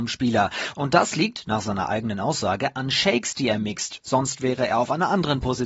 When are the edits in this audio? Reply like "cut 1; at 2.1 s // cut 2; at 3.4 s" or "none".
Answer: none